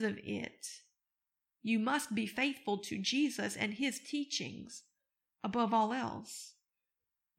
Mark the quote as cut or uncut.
uncut